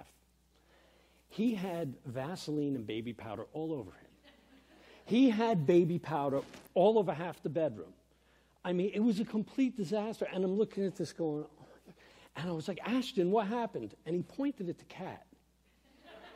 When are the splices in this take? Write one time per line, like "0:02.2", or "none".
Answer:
none